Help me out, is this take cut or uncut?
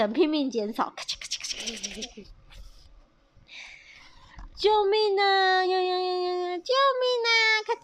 uncut